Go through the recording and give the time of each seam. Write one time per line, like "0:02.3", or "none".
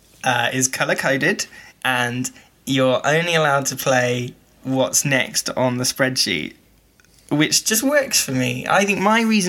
0:01.7

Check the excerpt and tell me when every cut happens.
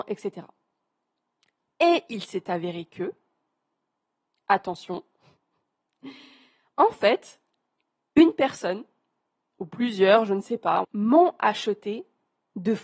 0:10.8

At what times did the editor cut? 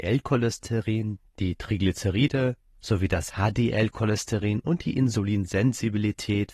0:02.7

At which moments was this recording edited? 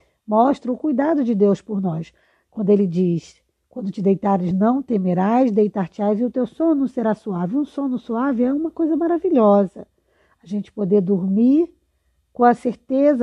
none

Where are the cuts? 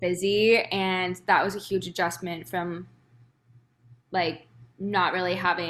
none

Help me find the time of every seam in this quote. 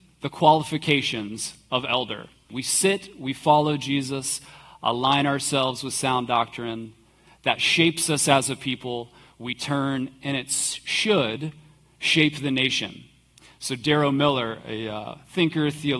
0:02.5

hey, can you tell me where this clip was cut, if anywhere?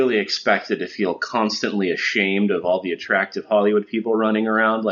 none

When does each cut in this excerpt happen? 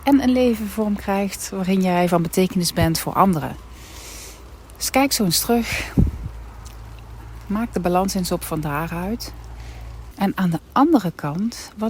0:10.1

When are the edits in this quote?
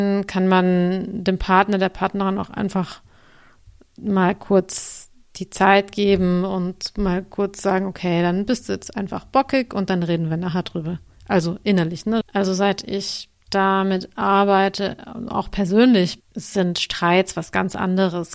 0:12.2
0:16.2

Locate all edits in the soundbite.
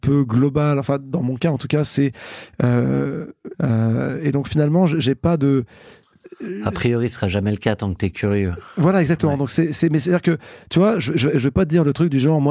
0:03.5

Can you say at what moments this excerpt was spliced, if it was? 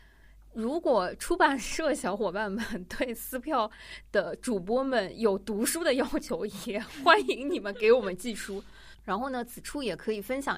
0:08.9

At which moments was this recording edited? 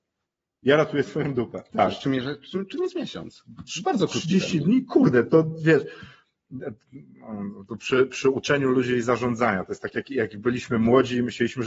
0:01.7

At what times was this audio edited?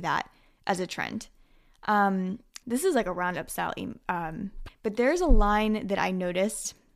0:02.6
0:04.7

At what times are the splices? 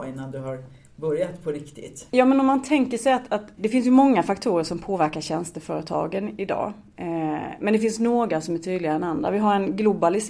0:02.1
0:03.6

